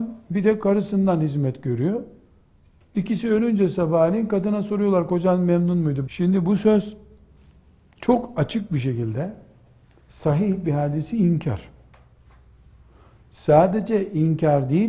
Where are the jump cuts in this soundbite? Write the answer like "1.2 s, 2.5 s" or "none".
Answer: 6.1 s